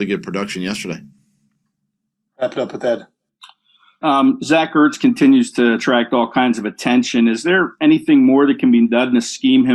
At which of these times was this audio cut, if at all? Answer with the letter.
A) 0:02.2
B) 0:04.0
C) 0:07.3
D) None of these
B